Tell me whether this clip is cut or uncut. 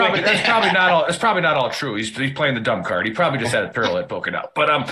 uncut